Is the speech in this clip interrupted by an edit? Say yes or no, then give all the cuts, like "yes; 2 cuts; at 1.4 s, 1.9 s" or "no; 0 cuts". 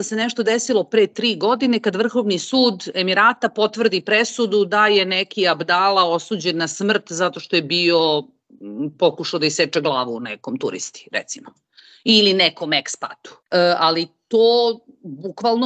no; 0 cuts